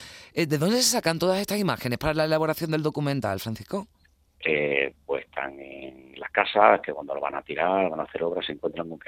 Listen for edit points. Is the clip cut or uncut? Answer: cut